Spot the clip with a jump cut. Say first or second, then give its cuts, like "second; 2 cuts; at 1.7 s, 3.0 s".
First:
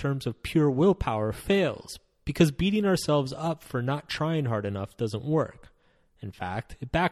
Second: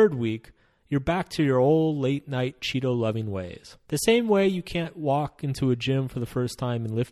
second; 1 cut; at 3.8 s